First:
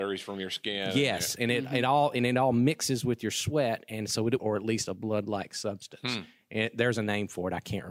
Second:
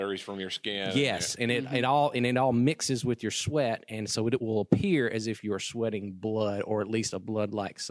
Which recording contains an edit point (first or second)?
first